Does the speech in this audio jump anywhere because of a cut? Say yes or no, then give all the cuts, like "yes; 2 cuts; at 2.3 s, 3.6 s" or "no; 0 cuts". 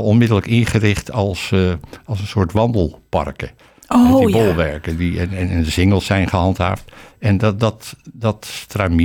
no; 0 cuts